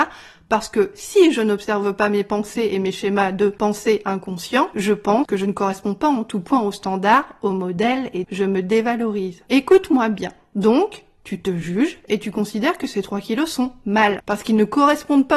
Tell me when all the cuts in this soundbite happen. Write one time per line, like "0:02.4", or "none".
0:08.2
0:10.5
0:14.2